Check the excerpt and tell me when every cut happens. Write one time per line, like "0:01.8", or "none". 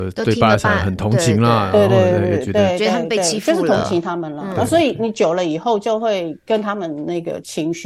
none